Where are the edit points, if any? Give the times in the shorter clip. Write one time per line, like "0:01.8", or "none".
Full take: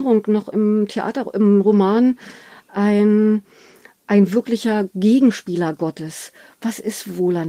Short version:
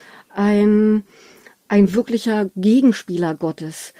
none